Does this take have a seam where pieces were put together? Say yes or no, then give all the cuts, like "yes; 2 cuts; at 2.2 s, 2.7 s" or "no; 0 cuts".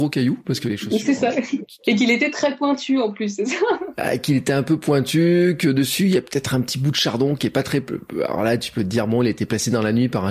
no; 0 cuts